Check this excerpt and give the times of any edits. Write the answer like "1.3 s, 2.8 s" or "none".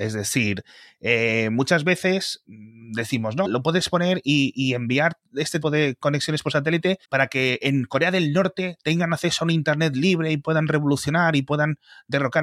3.4 s, 5.6 s, 7.0 s